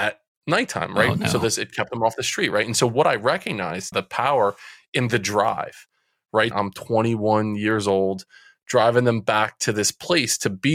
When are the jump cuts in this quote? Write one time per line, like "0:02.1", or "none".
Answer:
0:03.9
0:06.5